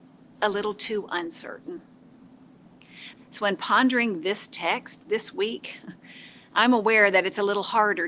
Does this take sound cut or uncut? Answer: cut